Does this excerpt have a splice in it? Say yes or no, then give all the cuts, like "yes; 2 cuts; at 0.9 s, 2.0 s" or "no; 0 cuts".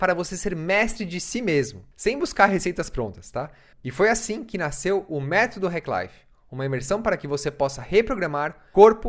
yes; 1 cut; at 3.7 s